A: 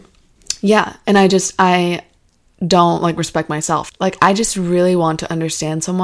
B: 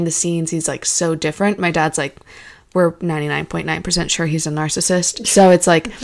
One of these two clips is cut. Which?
A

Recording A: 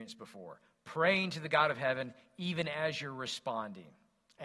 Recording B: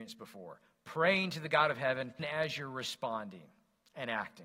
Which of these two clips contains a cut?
B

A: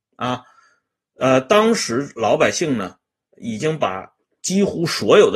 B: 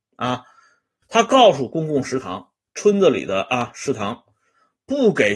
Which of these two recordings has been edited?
B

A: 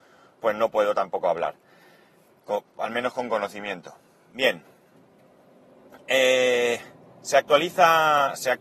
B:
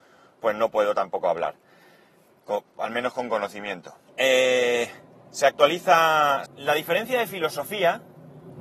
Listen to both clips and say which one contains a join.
B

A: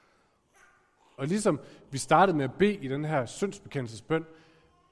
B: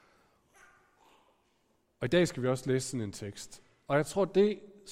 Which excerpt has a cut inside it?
A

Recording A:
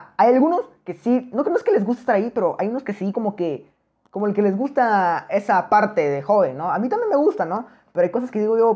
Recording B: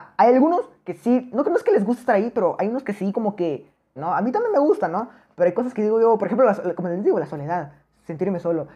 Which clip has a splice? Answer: B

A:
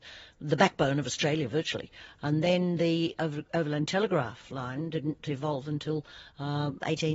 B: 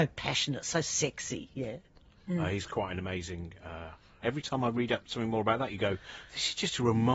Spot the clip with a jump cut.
B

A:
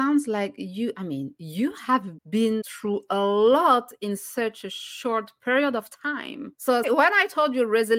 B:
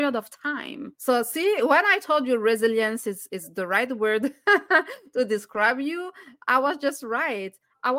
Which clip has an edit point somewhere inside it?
A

